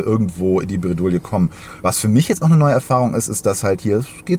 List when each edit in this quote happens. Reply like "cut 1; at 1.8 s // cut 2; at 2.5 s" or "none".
none

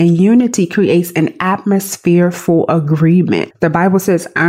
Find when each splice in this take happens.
cut 1; at 3.5 s

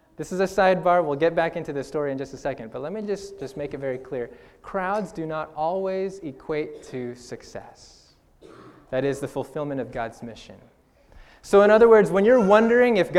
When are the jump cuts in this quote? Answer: none

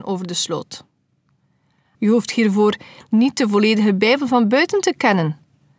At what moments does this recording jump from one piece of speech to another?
cut 1; at 1.9 s

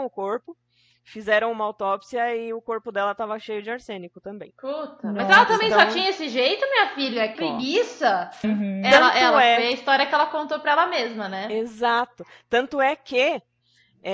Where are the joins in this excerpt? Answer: cut 1; at 7.4 s // cut 2; at 8.4 s

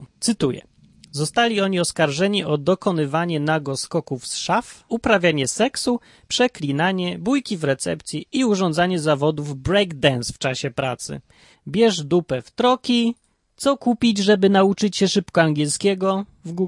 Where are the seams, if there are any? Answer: cut 1; at 4.9 s // cut 2; at 11.5 s

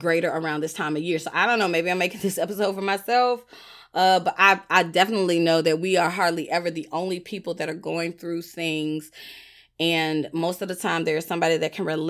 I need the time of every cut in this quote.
none

